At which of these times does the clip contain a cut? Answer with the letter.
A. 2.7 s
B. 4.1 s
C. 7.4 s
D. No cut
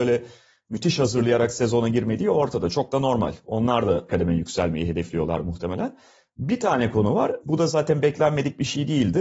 B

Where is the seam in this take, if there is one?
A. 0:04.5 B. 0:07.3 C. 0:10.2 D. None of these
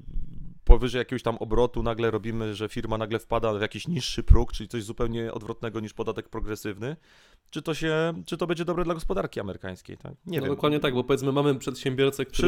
C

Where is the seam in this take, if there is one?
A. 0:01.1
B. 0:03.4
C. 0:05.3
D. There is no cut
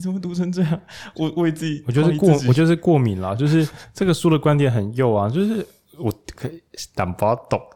D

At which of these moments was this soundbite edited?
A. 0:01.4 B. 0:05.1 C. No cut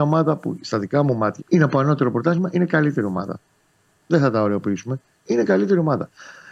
A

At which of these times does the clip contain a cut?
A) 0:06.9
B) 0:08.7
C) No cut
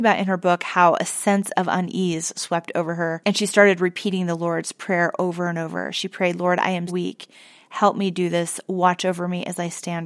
A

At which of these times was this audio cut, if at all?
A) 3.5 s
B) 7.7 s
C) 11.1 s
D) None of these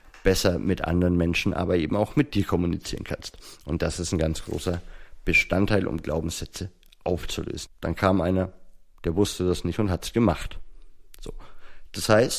B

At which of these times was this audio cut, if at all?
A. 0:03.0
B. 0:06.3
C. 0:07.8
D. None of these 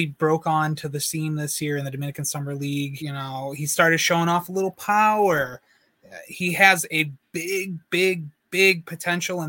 A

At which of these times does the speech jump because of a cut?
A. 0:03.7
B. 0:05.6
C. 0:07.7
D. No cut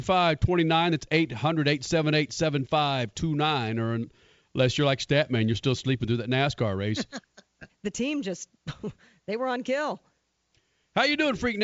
C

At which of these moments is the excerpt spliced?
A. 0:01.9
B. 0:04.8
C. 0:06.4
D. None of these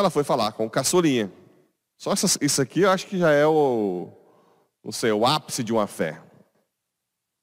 A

